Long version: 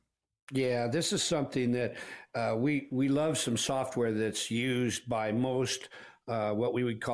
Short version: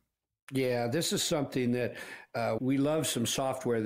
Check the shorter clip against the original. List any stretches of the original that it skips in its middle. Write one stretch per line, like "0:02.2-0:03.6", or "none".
0:02.6-0:02.9